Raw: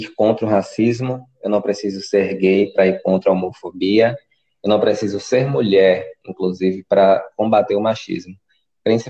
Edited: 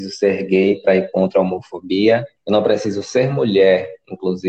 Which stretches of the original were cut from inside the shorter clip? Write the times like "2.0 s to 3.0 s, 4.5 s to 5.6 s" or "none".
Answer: 4.3 s to 4.5 s